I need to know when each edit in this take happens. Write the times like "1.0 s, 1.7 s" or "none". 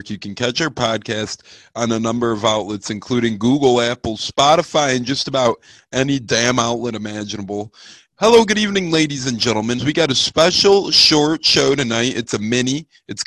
8.1 s, 9.8 s